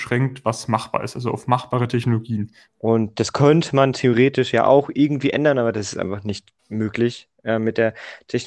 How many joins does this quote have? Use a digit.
2